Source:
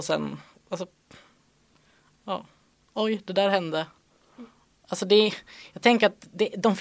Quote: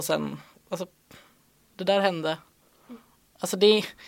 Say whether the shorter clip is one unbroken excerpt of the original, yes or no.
no